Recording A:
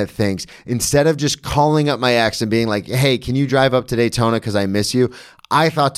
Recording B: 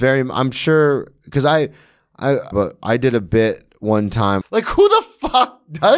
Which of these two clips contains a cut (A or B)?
B